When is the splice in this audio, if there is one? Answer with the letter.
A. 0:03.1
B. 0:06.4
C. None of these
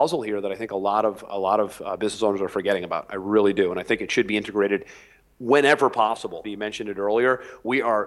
B